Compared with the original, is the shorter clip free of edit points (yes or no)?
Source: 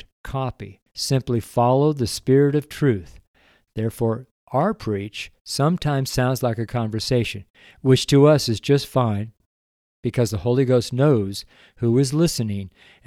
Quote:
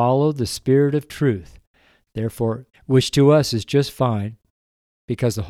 no